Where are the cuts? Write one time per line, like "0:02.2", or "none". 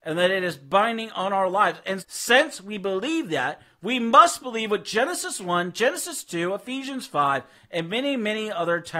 0:02.0